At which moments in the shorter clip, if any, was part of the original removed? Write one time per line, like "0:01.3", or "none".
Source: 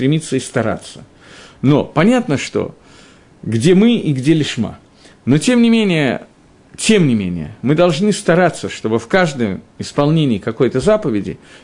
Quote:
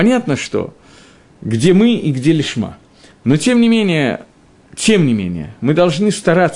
none